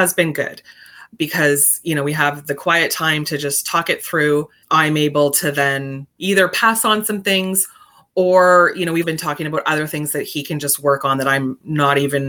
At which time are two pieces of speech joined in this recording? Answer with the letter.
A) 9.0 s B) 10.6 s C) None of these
A